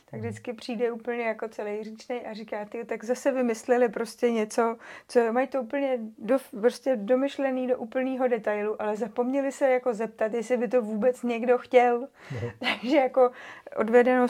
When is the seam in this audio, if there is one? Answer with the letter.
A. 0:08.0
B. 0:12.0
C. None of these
C